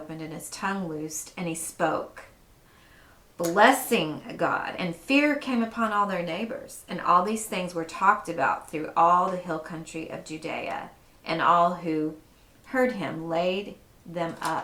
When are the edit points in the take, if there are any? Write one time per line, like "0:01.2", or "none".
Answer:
none